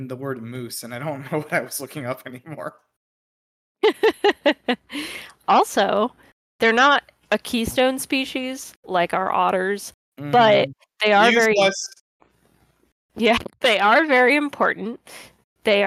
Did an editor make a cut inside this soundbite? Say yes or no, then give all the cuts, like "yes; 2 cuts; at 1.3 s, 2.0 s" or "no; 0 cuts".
no; 0 cuts